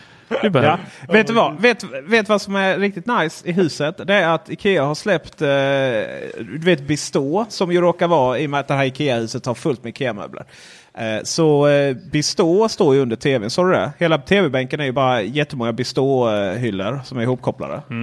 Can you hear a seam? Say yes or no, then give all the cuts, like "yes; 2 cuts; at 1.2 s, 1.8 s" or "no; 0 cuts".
no; 0 cuts